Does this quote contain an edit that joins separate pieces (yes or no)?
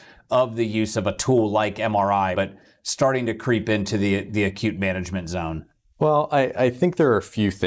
yes